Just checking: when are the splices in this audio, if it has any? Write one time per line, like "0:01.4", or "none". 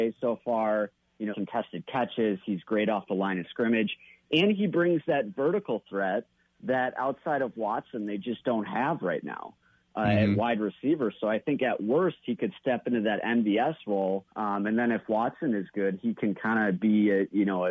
0:01.3
0:14.3